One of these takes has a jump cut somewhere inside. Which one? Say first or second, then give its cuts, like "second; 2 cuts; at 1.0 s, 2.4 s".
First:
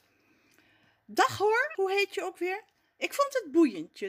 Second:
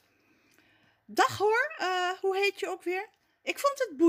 first; 1 cut; at 1.7 s